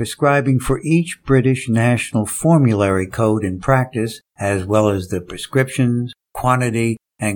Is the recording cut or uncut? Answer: uncut